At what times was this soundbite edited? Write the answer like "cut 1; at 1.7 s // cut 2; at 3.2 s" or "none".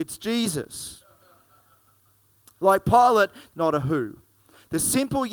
cut 1; at 3.5 s